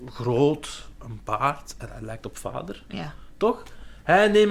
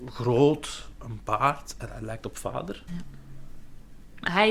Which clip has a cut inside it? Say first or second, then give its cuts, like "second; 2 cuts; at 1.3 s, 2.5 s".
second; 1 cut; at 2.9 s